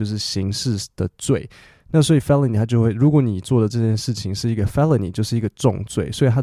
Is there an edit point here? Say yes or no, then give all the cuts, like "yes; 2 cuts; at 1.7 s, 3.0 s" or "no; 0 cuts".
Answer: no; 0 cuts